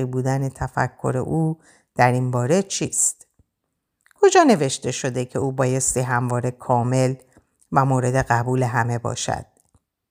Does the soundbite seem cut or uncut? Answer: uncut